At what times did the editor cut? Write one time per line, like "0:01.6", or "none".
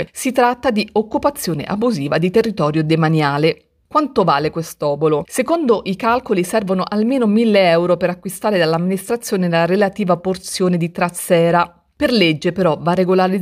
none